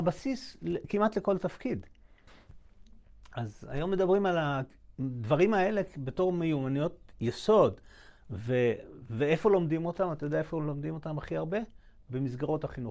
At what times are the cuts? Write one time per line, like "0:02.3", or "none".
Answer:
none

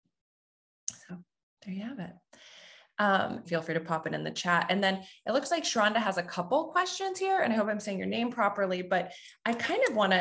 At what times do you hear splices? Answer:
0:03.4

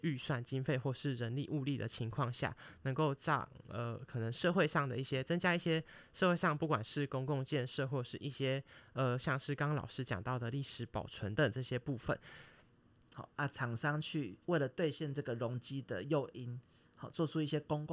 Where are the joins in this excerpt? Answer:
0:11.4
0:13.0
0:14.4

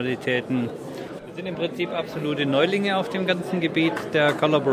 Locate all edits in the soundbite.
0:01.2

